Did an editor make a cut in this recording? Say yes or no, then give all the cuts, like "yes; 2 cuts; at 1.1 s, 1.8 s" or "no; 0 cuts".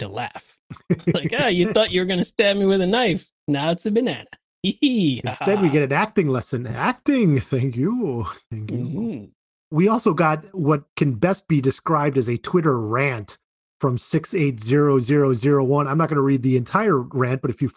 no; 0 cuts